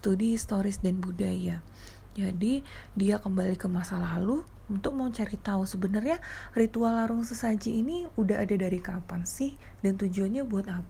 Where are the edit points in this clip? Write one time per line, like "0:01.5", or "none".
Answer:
none